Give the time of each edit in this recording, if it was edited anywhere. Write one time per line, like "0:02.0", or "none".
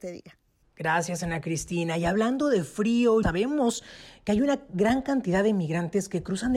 0:03.2

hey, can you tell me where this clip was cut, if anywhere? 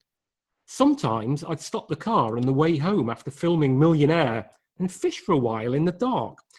none

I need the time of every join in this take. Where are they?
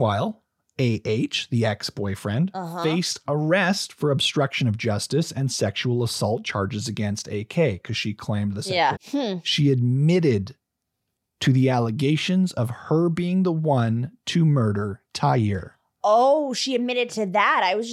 0:09.0

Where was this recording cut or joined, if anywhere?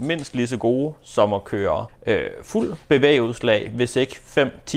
0:01.9

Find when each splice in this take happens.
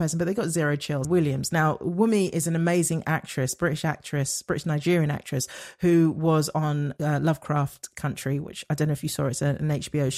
0:01.0

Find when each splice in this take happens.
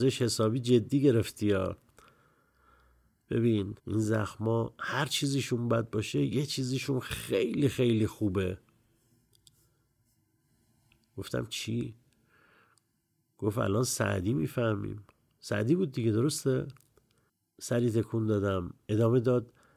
0:03.8

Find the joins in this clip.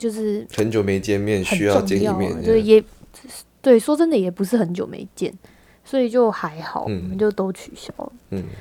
none

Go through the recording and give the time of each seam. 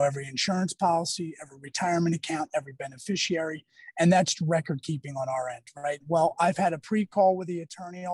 0:06.0

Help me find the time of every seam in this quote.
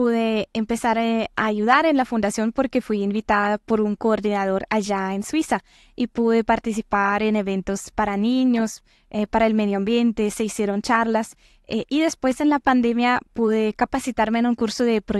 none

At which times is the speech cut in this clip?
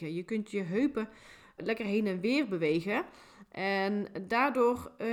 0:01.6

